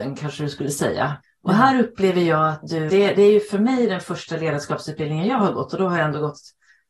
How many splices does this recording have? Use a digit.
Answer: 2